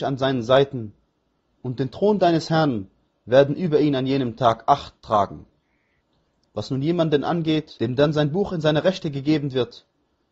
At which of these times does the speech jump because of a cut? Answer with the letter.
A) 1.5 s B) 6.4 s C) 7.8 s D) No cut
B